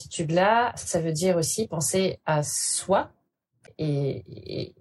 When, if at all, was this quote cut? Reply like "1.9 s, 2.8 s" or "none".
3.7 s

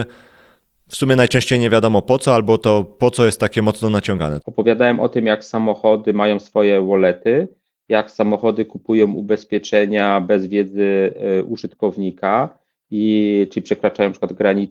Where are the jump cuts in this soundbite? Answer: 4.4 s

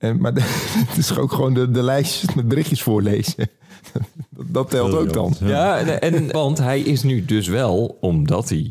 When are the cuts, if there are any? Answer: 6.3 s

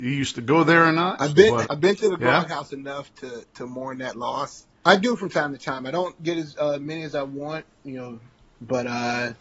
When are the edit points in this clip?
1.6 s, 4.8 s

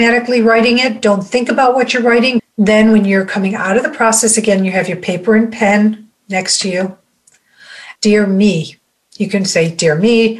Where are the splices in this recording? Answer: 2.4 s, 8.0 s

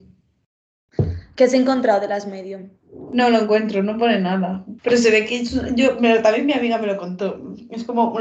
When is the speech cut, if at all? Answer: 4.8 s

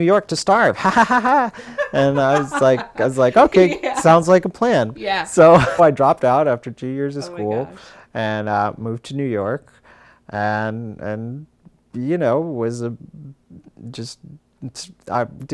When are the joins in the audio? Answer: 5.8 s

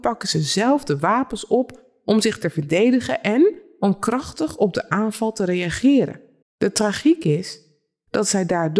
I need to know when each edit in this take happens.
6.4 s

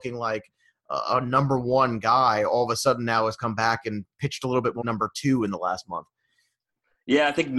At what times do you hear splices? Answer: 4.8 s

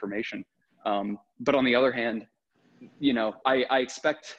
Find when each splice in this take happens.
3.4 s

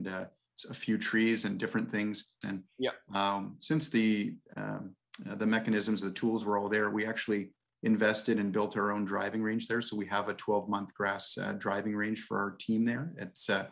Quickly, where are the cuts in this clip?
2.4 s

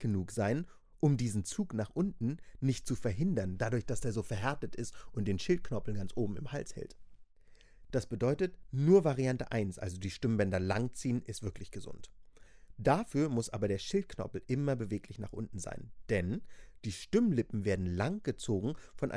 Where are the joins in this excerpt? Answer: 7.9 s

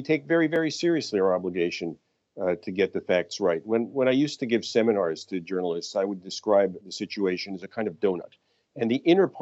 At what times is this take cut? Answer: none

